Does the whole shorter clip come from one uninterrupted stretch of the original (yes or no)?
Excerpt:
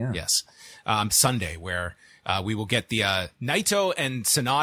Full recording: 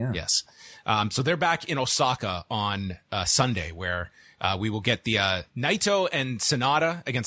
no